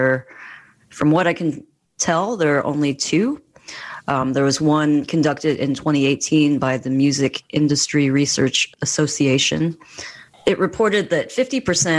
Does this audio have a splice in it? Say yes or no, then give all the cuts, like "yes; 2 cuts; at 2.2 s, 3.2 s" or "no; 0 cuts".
no; 0 cuts